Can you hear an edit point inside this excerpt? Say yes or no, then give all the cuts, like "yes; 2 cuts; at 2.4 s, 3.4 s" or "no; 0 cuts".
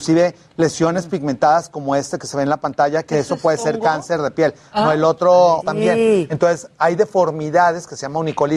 yes; 1 cut; at 5.6 s